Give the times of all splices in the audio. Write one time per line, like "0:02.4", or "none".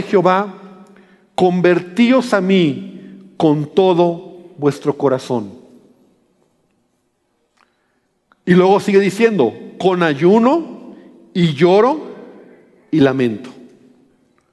none